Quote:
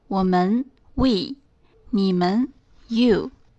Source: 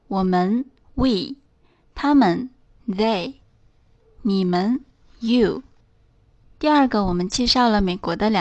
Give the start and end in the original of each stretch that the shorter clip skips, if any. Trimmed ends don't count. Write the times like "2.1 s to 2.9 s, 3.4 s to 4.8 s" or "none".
1.7 s to 4.0 s